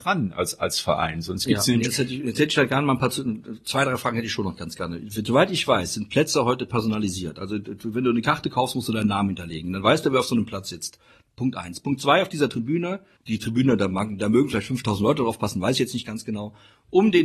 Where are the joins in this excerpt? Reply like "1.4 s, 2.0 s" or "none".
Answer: 13.2 s